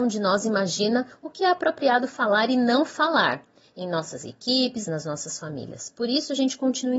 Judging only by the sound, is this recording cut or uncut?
cut